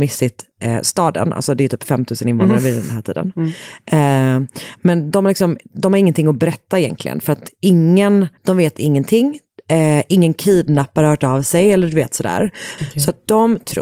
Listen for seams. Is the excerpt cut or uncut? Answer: cut